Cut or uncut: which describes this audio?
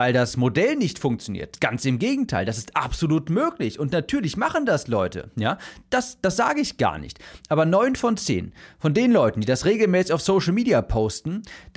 uncut